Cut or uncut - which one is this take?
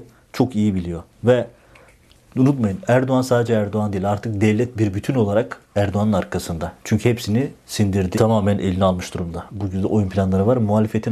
cut